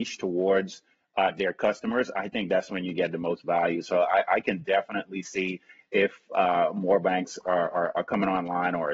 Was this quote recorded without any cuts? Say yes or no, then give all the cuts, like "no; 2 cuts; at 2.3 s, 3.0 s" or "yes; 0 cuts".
yes; 0 cuts